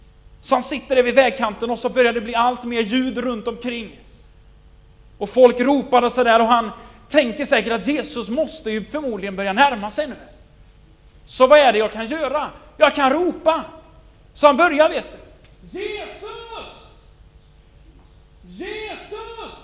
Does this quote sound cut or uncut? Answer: uncut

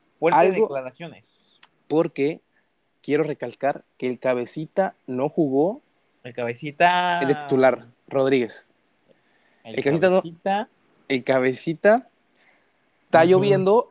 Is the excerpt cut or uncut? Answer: uncut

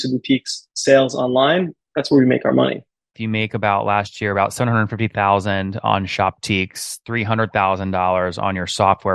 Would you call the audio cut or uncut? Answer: cut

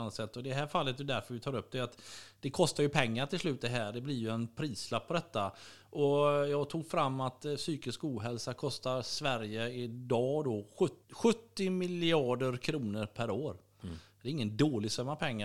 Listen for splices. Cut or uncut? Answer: cut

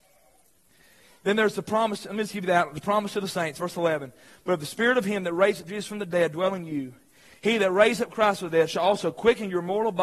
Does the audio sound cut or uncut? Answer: uncut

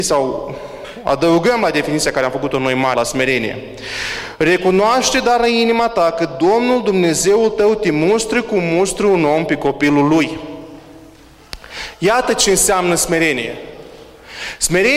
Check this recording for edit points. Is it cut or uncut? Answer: cut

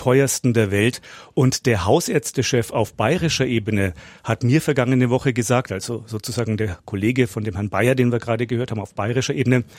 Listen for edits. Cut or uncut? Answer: uncut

